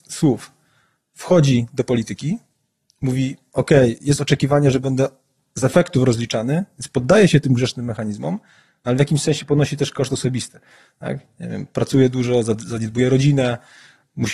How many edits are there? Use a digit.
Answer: 0